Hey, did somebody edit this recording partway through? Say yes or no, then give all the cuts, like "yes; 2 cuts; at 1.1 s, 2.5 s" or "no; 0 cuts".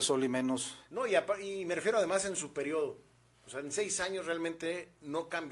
no; 0 cuts